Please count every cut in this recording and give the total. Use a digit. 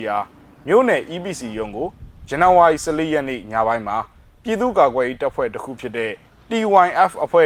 0